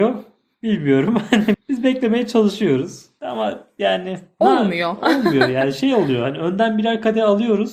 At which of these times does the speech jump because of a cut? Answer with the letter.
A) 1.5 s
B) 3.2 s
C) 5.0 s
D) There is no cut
A